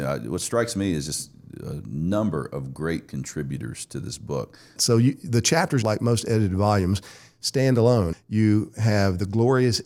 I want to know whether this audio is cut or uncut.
cut